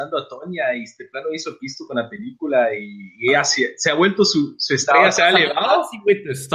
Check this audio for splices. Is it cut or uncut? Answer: uncut